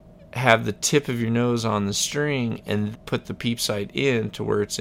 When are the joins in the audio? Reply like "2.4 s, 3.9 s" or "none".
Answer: 2.9 s